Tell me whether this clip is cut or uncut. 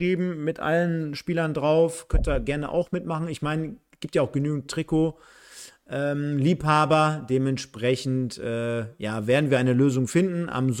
uncut